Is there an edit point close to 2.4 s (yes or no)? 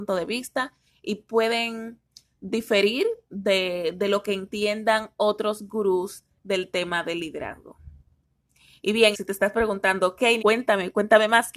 no